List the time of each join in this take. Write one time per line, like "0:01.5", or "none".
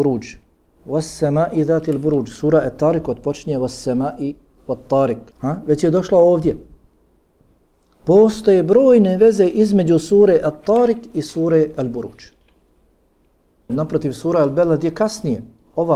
0:05.3
0:13.7